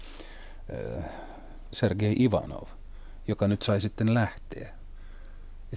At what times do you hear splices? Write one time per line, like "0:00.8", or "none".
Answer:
0:01.7